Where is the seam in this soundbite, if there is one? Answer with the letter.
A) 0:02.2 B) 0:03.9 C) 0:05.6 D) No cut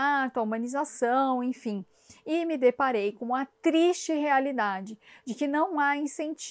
D